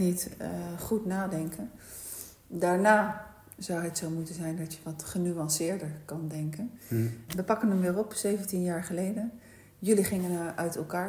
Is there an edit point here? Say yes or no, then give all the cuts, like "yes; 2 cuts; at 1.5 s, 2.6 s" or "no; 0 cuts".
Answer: yes; 1 cut; at 7.3 s